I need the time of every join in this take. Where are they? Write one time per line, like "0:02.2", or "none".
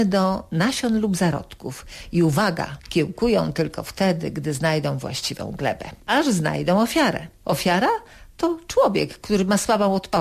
none